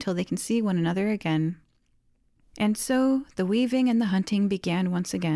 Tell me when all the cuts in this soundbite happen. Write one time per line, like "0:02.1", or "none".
0:02.4